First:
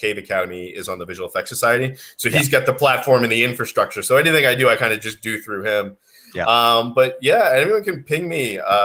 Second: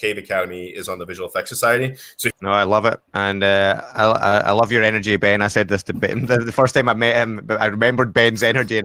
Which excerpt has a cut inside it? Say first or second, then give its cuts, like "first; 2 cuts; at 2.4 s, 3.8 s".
second; 1 cut; at 2.3 s